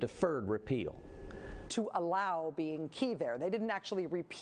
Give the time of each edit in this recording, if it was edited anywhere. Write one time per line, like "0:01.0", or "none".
0:01.7